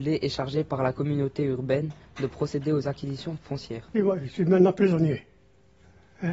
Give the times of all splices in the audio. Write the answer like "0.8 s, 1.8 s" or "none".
3.9 s